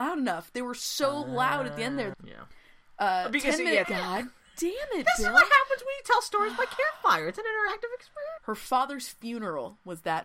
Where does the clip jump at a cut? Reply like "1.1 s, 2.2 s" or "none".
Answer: 2.1 s, 3.8 s, 8.4 s